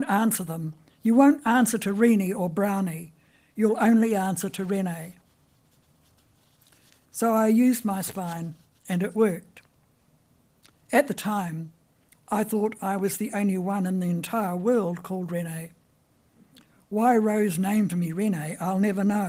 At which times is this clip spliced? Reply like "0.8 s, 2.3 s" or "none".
none